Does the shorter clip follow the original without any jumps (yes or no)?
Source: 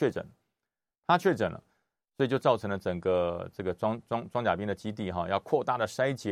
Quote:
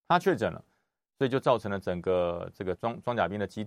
no